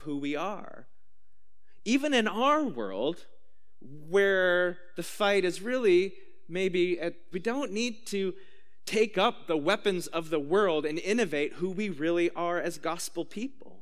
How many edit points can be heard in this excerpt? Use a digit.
1